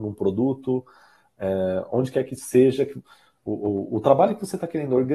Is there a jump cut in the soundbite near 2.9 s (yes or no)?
no